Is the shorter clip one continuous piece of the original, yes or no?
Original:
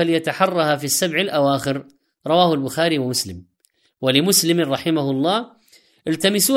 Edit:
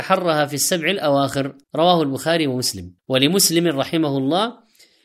no